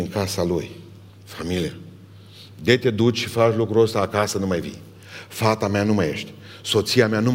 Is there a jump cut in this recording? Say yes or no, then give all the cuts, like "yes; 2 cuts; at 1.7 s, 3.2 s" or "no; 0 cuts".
yes; 1 cut; at 1.1 s